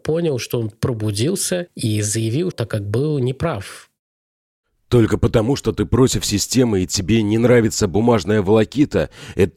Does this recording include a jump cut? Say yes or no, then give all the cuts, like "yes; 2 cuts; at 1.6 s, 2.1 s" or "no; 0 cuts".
yes; 1 cut; at 2.5 s